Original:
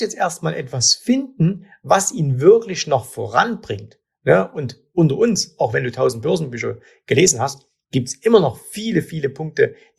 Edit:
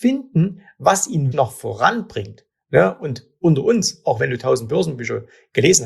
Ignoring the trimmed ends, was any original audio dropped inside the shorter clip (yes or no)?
yes